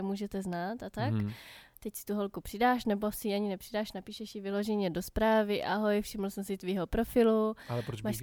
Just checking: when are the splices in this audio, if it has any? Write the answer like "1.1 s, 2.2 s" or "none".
none